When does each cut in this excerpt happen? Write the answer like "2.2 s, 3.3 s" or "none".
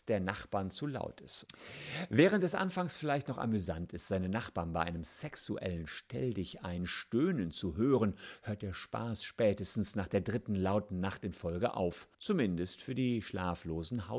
1.5 s, 12.1 s